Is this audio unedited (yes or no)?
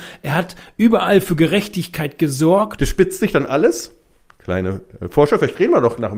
no